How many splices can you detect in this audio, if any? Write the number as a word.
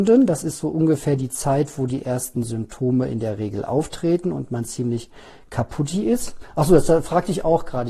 zero